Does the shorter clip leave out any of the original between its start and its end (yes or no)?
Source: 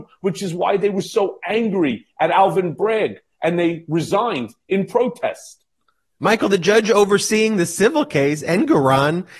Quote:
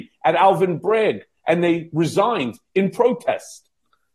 no